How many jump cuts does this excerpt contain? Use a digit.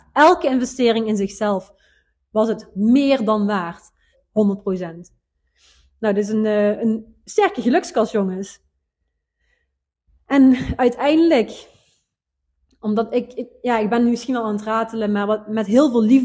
1